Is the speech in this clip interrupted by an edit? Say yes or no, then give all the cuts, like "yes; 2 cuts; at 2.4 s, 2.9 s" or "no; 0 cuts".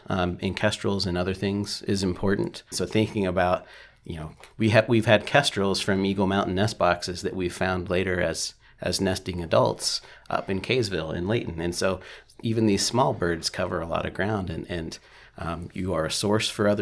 yes; 1 cut; at 2.7 s